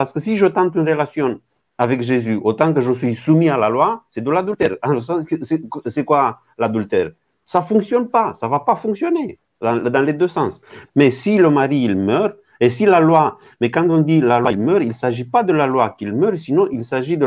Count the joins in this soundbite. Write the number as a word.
one